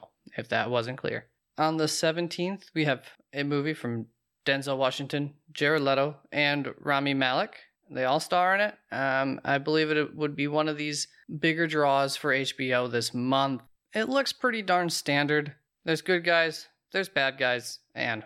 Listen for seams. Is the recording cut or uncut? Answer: uncut